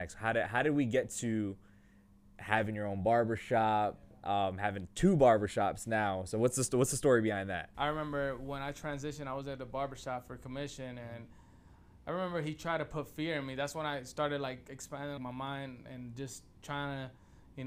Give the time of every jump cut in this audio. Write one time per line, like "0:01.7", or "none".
0:07.7
0:15.2